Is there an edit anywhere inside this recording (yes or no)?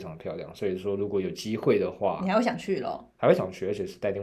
no